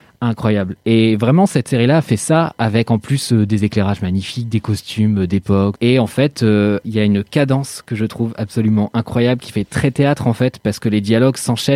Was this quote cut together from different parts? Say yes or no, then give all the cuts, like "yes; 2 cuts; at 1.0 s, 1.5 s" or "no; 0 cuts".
yes; 2 cuts; at 5.8 s, 6.8 s